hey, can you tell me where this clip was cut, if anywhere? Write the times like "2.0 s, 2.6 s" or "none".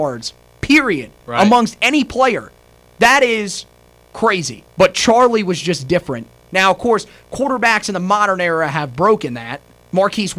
4.7 s, 6.5 s

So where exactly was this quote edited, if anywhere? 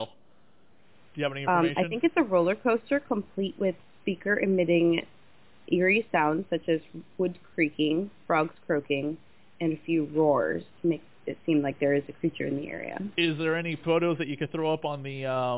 none

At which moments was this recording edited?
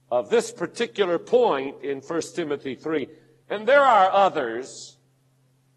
3.4 s

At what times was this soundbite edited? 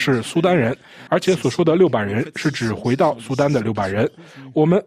1.1 s

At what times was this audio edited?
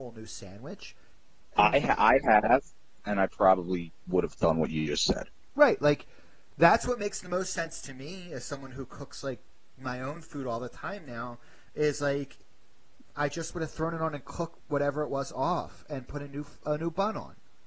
1.5 s

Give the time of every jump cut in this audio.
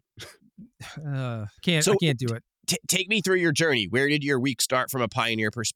1.6 s

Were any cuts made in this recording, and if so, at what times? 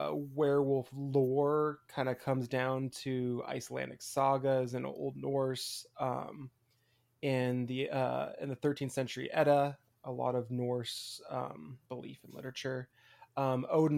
9.9 s, 11.8 s

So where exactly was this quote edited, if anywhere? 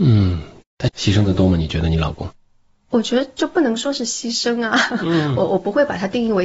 none

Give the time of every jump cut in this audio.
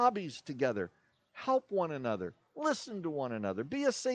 none

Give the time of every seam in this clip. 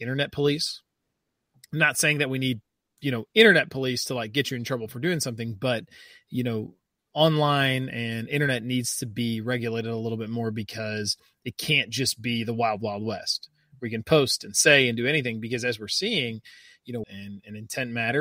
17.0 s

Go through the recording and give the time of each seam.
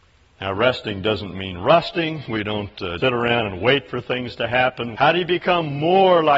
3.0 s, 4.9 s

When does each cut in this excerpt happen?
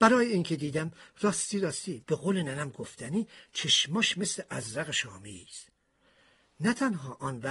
none

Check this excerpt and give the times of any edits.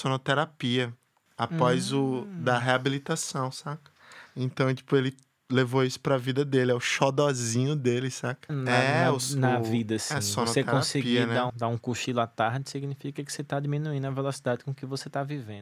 4.3 s, 8.5 s, 11.5 s

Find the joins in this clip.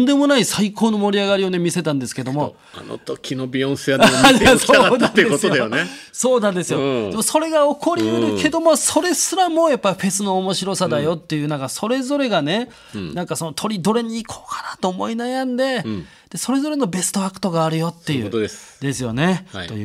none

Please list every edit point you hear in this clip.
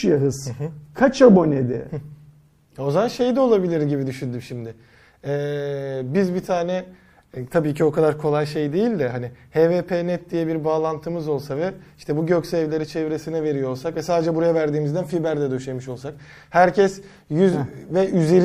none

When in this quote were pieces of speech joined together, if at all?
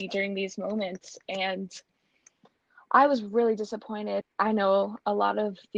4.2 s

